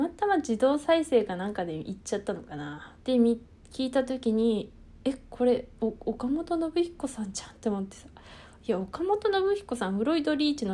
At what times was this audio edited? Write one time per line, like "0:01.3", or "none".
0:03.0
0:05.7